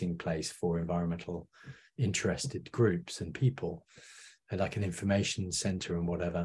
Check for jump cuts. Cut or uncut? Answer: uncut